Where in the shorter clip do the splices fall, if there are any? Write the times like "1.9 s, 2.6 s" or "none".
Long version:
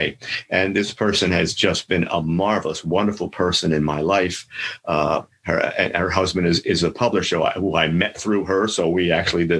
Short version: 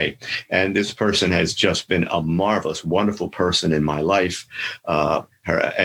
none